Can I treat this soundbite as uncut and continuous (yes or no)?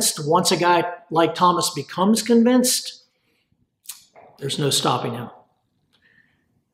yes